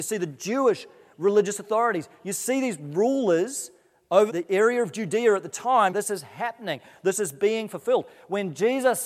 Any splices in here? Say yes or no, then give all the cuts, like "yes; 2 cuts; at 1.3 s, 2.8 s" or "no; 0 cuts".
yes; 2 cuts; at 4.3 s, 5.9 s